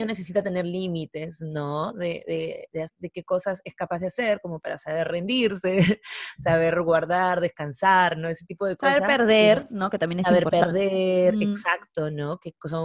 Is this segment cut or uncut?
uncut